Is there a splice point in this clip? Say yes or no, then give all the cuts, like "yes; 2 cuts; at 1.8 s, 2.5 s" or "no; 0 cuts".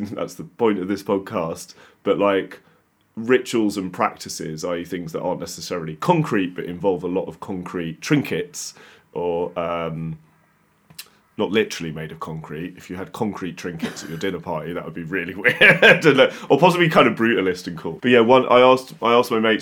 yes; 1 cut; at 18.0 s